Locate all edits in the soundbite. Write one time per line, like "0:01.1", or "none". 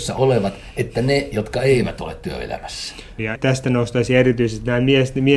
0:03.2